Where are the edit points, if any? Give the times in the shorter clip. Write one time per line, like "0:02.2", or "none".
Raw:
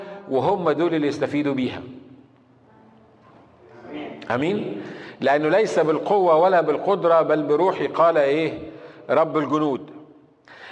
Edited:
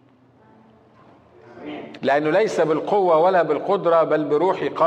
0:02.0